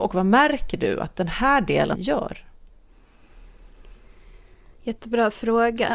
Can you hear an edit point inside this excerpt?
yes; 1 cut; at 2.0 s

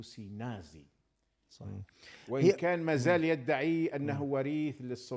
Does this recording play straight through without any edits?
yes; 0 cuts

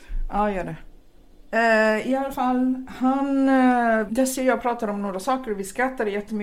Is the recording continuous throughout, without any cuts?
no; 1 cut; at 4.1 s

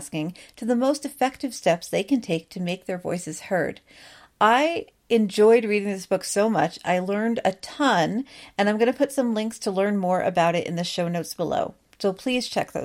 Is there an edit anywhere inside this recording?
no; 0 cuts

